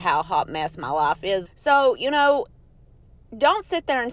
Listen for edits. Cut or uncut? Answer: cut